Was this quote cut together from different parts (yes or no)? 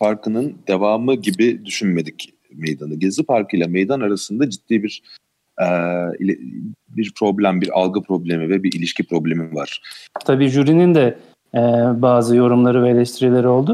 yes